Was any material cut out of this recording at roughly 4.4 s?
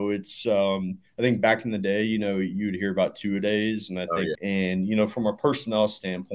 yes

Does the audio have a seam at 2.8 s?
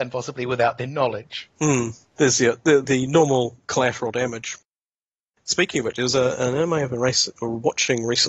yes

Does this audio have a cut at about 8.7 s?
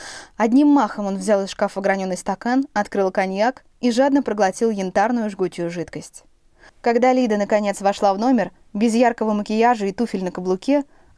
no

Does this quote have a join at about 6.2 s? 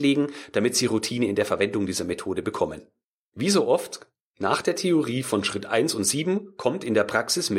no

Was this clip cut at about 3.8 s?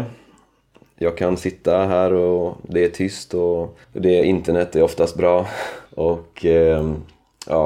yes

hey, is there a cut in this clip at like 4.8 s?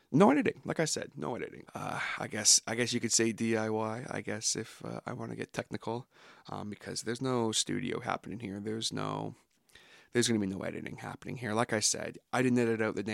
no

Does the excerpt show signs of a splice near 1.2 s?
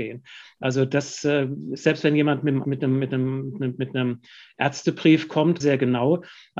no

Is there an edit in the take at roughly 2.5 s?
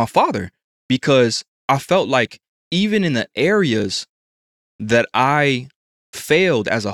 no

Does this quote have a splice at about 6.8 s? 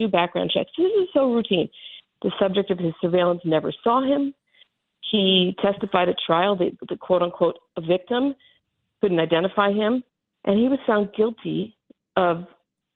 yes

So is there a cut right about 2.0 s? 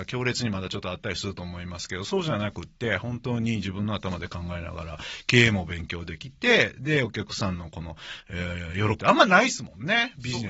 no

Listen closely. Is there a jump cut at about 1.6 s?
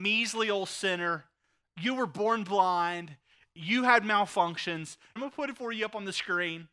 no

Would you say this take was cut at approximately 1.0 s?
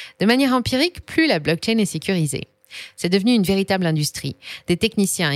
yes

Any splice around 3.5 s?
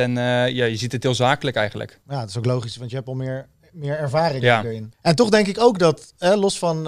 no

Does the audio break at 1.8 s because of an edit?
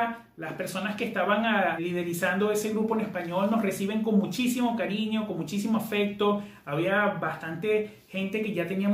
yes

